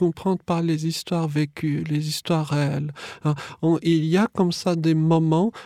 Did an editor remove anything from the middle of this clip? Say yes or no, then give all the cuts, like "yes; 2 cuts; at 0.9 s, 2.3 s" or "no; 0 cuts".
no; 0 cuts